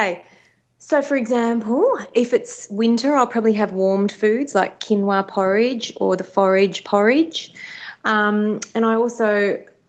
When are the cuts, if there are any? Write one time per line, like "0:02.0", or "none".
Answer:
none

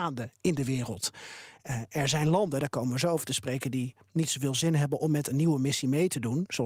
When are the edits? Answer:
none

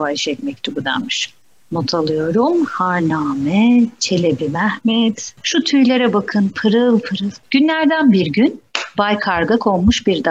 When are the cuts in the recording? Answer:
0:05.4
0:07.4

